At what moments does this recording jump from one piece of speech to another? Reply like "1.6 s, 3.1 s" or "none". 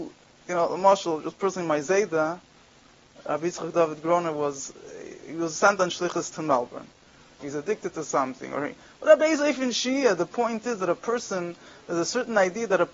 7.4 s